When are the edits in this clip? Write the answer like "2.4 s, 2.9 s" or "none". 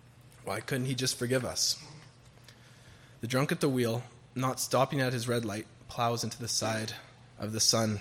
3.2 s